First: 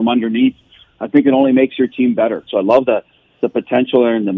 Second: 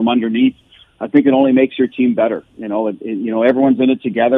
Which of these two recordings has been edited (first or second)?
first